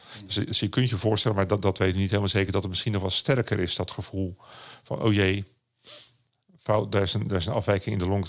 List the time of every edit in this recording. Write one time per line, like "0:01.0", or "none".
none